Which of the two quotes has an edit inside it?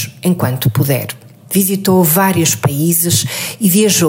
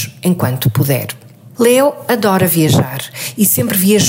first; 1 cut; at 1.4 s

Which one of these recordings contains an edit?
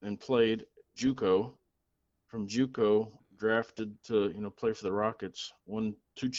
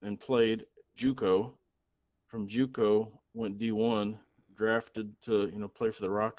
first; 1 cut; at 3.2 s

